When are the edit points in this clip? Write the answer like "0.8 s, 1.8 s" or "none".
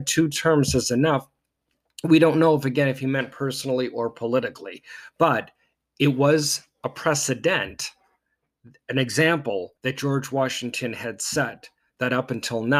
9.8 s